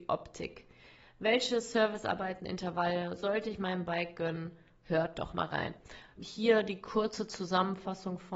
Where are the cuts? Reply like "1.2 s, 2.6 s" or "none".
6.1 s

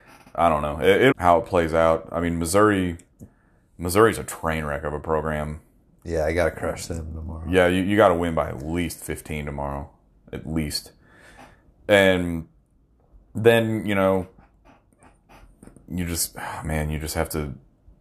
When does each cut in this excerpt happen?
1.1 s

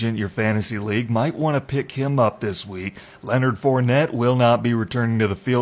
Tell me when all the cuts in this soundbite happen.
none

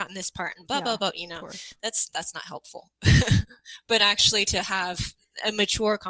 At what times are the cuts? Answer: none

